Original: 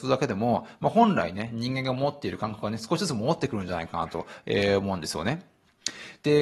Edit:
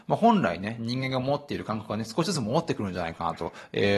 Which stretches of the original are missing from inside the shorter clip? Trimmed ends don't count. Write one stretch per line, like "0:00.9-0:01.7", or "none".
none